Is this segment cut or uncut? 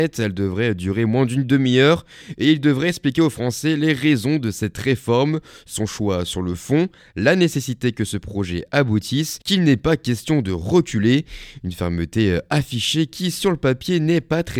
cut